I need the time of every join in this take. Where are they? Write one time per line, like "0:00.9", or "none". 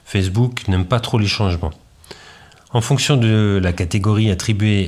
none